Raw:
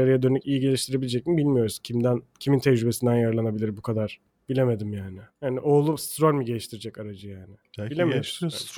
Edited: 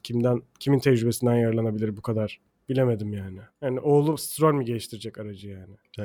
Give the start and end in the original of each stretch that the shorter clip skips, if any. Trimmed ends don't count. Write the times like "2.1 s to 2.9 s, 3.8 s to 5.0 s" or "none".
none